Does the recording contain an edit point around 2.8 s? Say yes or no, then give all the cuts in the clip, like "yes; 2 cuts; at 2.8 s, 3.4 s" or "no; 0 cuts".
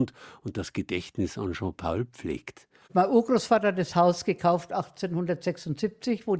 yes; 1 cut; at 2.8 s